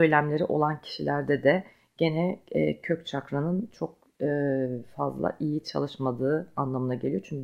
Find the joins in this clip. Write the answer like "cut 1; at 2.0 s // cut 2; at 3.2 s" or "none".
none

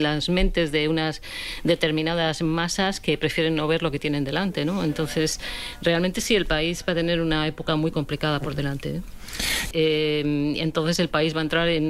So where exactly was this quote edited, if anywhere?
cut 1; at 9.7 s

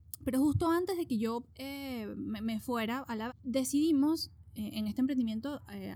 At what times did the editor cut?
cut 1; at 3.3 s

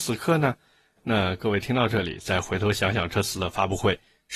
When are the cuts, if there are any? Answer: none

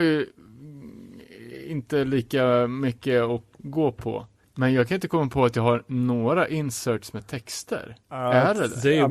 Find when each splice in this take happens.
cut 1; at 3.6 s

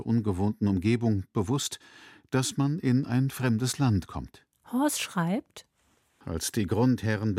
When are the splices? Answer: cut 1; at 4.5 s // cut 2; at 6.2 s

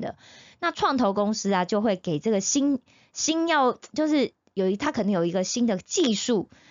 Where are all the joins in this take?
none

